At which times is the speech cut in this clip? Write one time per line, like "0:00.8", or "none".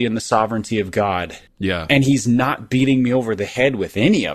0:01.5